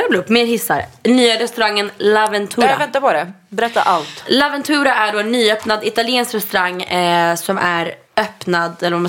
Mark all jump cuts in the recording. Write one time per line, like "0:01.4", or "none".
0:08.0

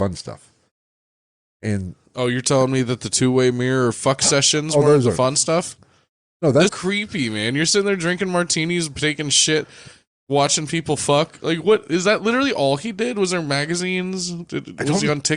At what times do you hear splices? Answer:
0:06.7

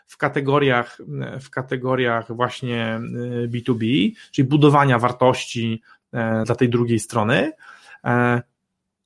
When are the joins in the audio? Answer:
0:06.4

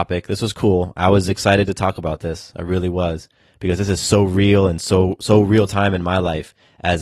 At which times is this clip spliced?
none

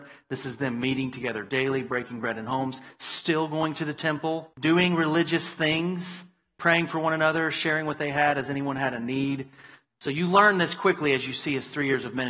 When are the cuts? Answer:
0:04.5
0:09.9

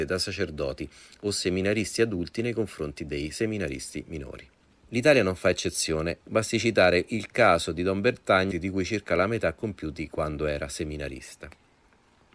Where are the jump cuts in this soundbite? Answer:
0:06.2
0:08.5

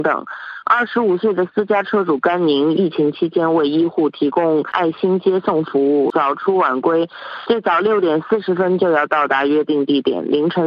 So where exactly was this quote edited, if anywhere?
none

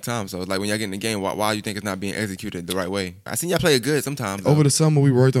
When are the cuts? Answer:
0:03.3

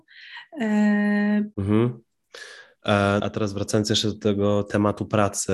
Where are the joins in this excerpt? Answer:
0:01.5
0:03.2

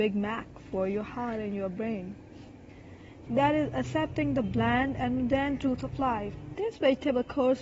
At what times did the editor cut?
0:03.3
0:06.5

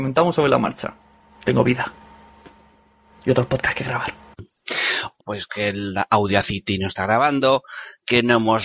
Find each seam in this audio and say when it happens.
0:01.3
0:05.2

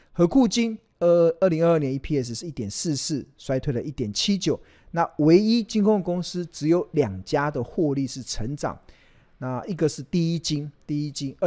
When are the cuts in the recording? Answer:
none

